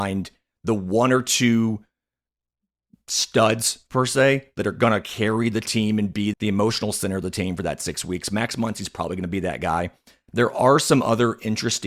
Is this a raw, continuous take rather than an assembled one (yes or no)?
no